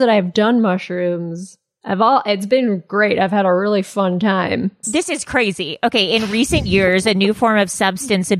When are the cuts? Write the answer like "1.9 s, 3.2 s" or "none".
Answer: 4.8 s